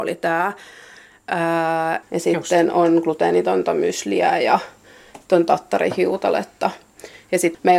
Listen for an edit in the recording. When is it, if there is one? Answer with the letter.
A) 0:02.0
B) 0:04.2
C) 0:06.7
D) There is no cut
A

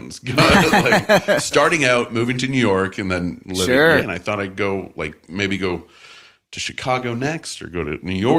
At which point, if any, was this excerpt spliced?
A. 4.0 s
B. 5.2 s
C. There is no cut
A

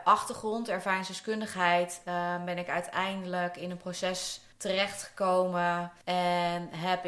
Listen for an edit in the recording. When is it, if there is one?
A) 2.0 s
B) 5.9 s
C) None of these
C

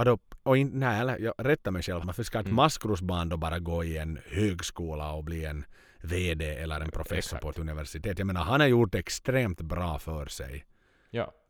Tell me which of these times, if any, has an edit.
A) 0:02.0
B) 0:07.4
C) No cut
A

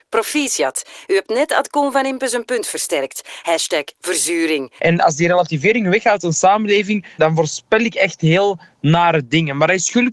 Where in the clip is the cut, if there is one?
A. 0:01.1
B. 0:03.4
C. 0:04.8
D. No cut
C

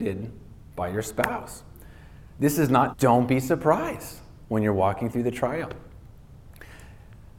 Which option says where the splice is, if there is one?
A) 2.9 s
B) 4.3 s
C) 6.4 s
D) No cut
A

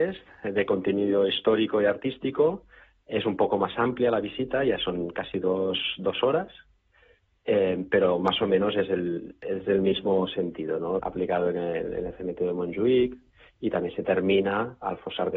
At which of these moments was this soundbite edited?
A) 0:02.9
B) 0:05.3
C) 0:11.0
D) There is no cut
C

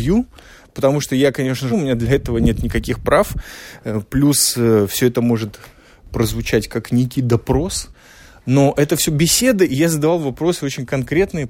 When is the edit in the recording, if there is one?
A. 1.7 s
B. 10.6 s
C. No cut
A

